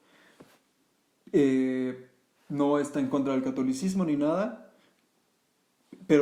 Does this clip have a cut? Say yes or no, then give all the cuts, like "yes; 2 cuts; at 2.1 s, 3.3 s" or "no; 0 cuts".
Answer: no; 0 cuts